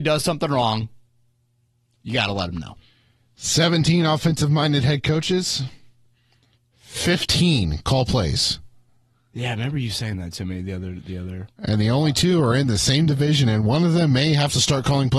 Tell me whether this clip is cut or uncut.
uncut